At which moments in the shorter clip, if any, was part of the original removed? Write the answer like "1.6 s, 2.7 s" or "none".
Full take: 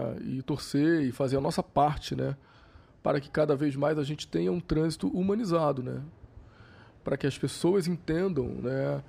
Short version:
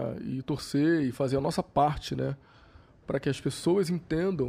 3.0 s